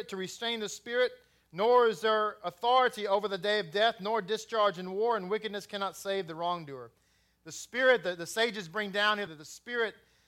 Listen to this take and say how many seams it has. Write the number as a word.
one